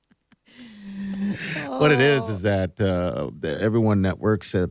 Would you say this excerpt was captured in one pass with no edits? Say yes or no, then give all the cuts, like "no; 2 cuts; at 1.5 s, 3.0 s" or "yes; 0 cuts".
yes; 0 cuts